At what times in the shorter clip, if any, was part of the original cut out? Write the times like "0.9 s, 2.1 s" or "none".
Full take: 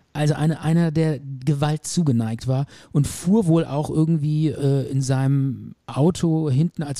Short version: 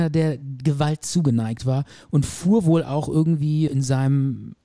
3.7 s